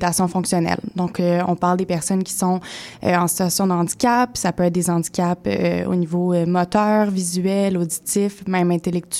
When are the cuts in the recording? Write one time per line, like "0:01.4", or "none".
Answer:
none